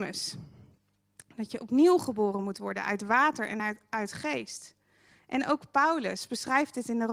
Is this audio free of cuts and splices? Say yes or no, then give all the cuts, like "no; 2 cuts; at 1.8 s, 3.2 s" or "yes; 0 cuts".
yes; 0 cuts